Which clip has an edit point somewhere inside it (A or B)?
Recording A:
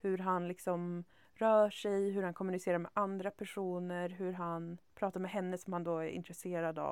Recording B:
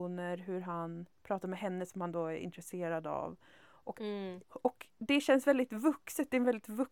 B